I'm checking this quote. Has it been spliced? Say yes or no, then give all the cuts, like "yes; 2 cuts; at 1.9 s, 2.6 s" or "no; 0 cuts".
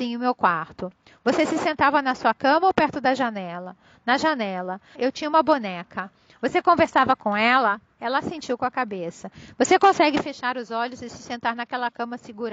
yes; 1 cut; at 4.9 s